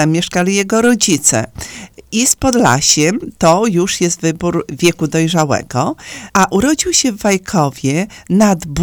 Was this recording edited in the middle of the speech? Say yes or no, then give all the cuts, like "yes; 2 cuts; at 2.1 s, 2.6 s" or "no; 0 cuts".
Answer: yes; 1 cut; at 6.3 s